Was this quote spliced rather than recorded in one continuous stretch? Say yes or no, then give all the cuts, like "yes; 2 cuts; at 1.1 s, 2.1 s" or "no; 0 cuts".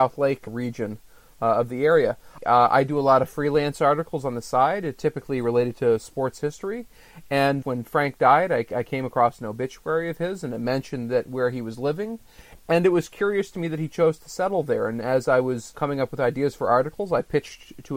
no; 0 cuts